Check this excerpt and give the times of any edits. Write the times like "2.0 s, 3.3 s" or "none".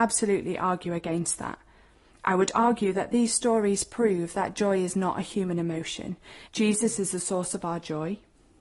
6.5 s